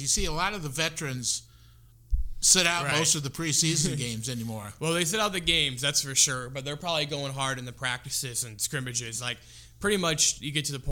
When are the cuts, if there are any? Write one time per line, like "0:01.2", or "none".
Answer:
none